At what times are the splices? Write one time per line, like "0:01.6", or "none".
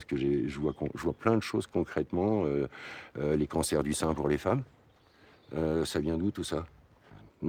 none